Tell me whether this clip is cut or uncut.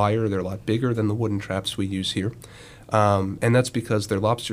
uncut